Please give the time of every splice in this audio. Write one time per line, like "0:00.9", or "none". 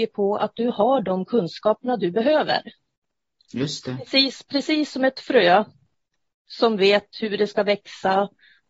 none

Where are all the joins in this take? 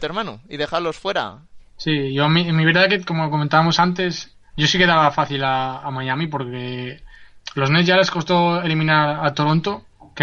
0:01.6
0:04.4

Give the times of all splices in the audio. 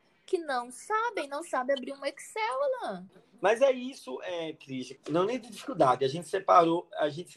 0:03.1
0:05.0

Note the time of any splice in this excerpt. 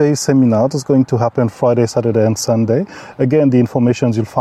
none

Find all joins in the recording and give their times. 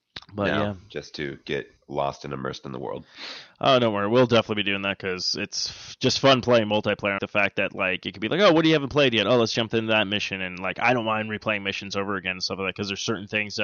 0:07.2

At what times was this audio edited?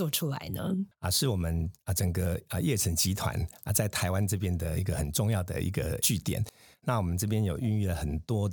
0:00.9

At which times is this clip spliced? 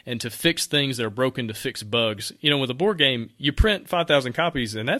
none

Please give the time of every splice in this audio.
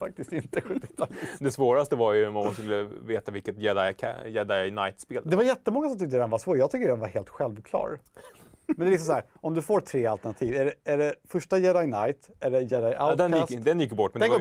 none

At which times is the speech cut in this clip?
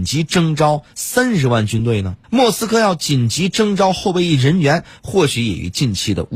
0:02.2

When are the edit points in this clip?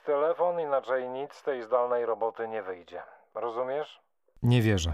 none

